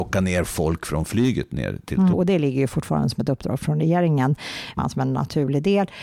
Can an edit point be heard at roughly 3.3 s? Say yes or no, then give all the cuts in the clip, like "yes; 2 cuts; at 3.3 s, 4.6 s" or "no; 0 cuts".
no; 2 cuts; at 2.1 s, 4.8 s